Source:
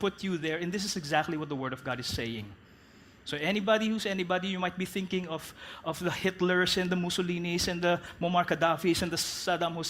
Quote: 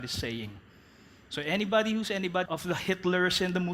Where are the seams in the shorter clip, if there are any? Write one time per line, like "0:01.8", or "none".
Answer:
0:02.5